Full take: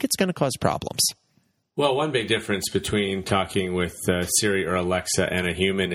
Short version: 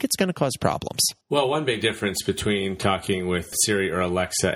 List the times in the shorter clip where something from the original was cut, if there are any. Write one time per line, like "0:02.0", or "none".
0:01.2
0:03.5